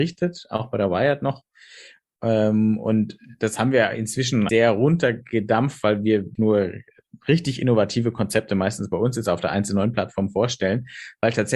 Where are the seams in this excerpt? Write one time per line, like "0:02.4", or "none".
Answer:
0:04.5
0:06.4